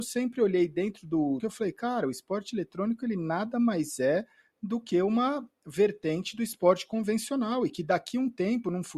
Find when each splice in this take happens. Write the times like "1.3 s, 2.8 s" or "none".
1.4 s